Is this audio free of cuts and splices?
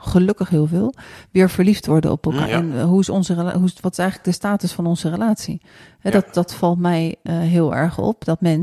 no; 1 cut; at 2.5 s

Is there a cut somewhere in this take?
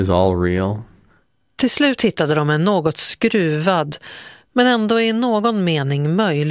no; 0 cuts

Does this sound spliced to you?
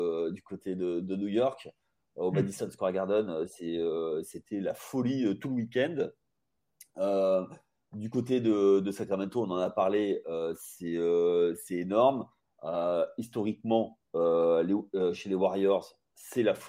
no; 0 cuts

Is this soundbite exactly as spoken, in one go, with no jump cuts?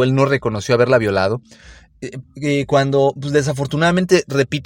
no; 1 cut; at 2.2 s

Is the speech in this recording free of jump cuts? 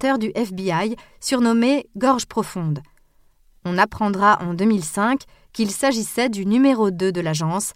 yes; 0 cuts

